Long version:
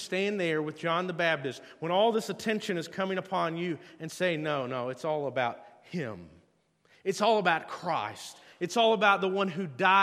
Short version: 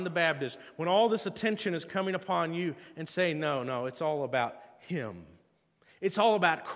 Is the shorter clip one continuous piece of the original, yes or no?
yes